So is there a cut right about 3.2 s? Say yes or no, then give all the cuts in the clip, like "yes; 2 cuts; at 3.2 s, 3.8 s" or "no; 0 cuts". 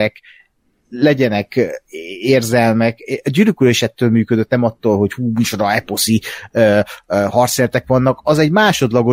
no; 0 cuts